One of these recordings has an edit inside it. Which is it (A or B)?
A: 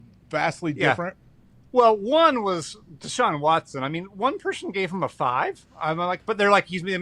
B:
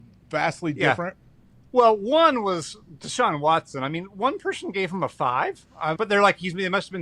B